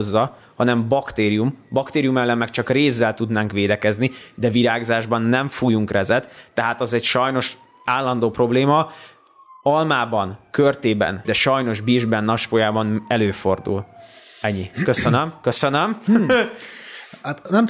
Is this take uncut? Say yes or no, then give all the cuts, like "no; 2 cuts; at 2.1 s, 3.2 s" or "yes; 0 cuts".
no; 1 cut; at 11.2 s